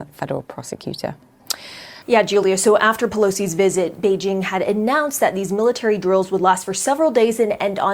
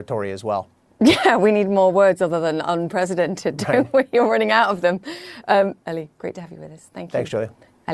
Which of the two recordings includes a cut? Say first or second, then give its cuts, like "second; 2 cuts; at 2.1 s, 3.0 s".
first; 1 cut; at 2.0 s